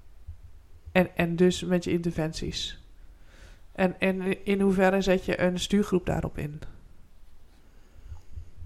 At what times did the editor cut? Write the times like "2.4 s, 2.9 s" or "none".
none